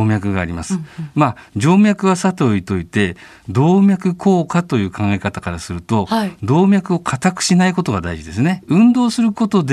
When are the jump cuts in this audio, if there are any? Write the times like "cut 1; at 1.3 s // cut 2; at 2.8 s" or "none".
cut 1; at 8.6 s